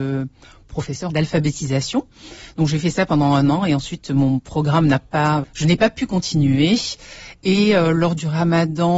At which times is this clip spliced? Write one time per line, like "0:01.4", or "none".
0:01.1
0:05.4